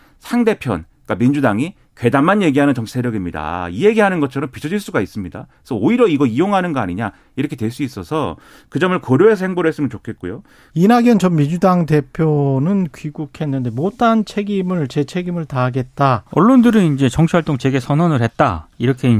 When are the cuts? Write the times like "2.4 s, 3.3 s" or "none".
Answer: 10.7 s, 16.3 s